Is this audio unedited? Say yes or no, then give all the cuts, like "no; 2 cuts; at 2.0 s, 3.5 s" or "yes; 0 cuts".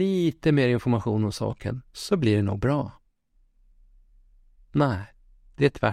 yes; 0 cuts